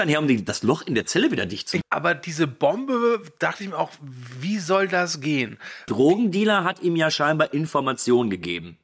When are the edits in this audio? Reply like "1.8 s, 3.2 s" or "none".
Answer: 1.8 s, 5.9 s